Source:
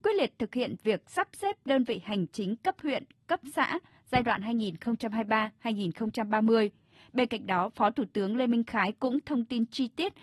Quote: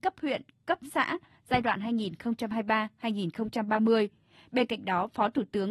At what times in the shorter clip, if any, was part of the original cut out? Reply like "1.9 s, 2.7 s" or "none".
none